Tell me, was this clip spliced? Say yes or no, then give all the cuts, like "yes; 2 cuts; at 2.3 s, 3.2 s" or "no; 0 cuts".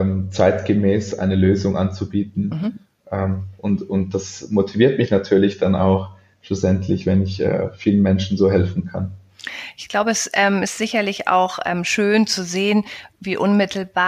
no; 0 cuts